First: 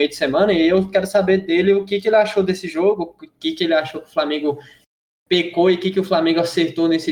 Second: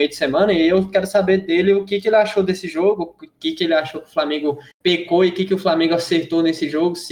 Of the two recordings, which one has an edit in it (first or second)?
second